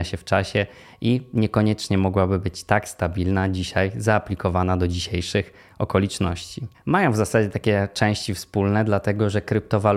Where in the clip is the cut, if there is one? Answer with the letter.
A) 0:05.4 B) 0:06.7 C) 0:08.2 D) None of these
B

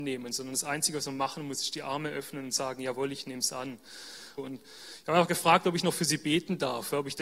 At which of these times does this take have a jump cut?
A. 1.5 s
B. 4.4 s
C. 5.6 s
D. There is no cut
B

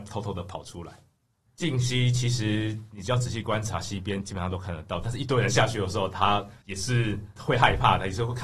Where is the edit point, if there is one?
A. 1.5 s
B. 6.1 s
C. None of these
A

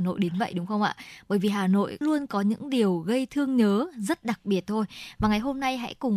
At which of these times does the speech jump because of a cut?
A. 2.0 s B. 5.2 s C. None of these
A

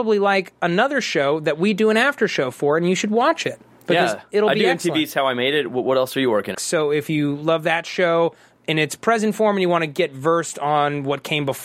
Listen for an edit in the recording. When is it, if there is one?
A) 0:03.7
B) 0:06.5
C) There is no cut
B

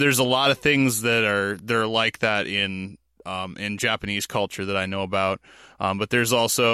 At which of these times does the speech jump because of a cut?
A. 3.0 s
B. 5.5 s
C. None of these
C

